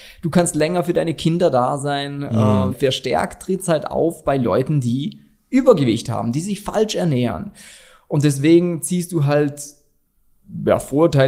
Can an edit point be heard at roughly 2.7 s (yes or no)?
yes